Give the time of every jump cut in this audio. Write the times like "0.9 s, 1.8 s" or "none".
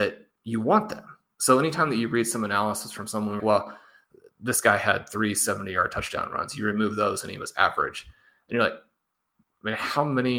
3.4 s